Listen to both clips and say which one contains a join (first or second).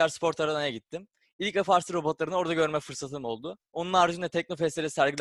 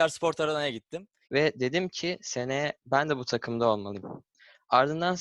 second